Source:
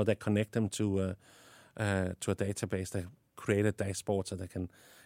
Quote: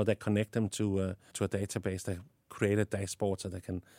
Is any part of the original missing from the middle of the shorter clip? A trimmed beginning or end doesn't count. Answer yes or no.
yes